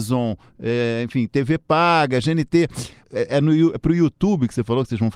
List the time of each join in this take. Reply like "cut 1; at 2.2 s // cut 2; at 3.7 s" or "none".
cut 1; at 3.0 s